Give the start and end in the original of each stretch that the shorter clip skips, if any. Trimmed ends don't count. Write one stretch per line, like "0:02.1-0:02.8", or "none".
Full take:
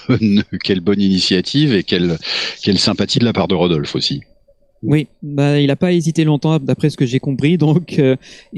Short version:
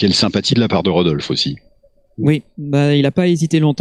none